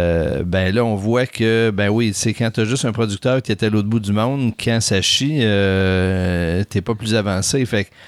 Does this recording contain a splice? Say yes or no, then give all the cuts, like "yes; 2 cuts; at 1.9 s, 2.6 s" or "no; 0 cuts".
no; 0 cuts